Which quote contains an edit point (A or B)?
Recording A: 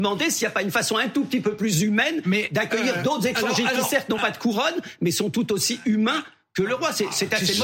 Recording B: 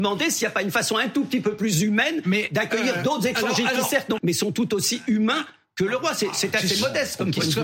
B